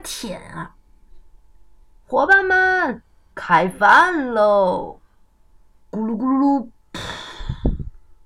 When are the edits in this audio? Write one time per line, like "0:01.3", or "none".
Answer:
0:02.0
0:05.8